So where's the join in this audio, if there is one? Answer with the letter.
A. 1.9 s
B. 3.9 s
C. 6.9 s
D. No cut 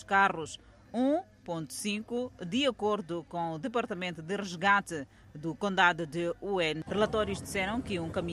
C